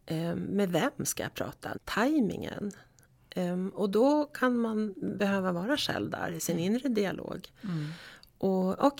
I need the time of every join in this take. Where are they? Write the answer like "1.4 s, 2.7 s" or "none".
1.7 s